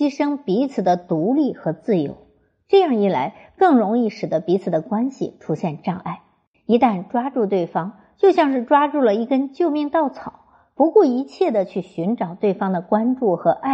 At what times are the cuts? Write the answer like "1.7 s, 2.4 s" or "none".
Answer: 6.5 s